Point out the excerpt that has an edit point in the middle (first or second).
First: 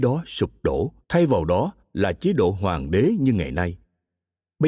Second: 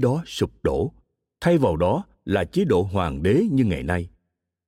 first